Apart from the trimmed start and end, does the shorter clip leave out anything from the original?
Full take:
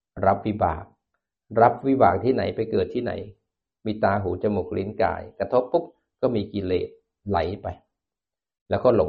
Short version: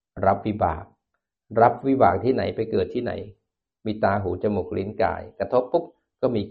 no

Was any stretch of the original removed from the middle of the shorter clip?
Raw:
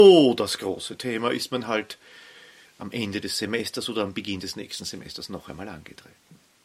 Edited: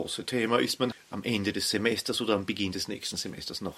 yes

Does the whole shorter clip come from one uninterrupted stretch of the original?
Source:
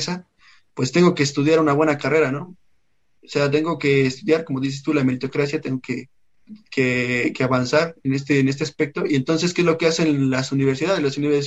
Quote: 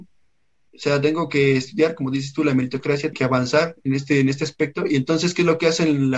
no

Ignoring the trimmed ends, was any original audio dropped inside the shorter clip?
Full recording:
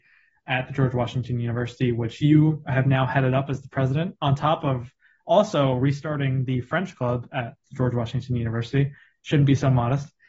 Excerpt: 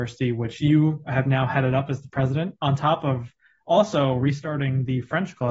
no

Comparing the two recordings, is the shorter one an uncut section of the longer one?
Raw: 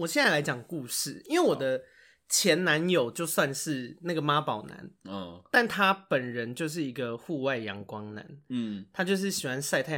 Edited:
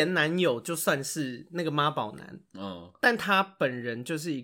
yes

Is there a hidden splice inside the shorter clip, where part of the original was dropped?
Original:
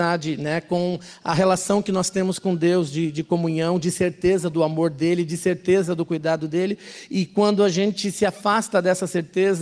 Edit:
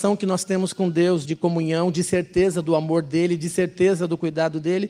yes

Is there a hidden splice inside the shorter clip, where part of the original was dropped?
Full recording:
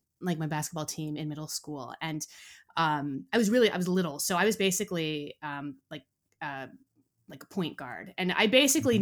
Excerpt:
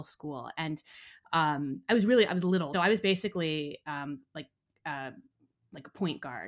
yes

